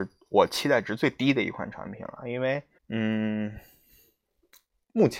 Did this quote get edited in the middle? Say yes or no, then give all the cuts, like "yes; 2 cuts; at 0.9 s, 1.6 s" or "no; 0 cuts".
yes; 1 cut; at 2.8 s